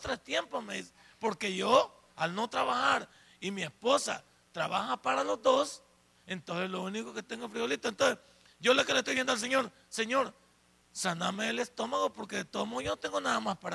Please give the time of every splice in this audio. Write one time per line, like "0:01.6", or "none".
0:02.1